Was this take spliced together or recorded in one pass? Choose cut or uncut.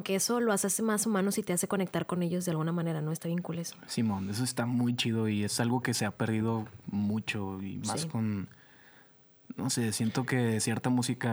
uncut